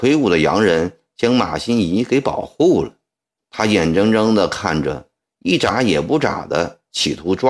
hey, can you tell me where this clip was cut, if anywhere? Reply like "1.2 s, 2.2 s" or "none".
3.4 s